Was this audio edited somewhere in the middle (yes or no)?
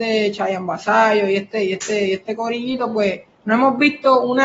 no